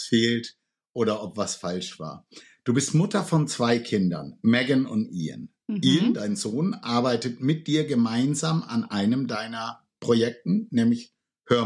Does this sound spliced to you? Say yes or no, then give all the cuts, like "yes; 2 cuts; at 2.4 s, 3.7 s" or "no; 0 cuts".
no; 0 cuts